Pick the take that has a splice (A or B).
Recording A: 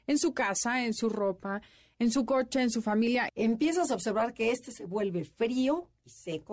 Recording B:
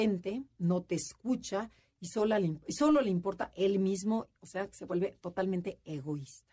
A